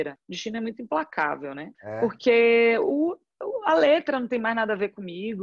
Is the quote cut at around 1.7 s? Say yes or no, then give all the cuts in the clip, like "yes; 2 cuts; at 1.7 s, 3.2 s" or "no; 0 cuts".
yes; 1 cut; at 1.7 s